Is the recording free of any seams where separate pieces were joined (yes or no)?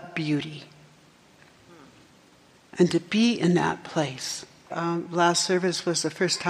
no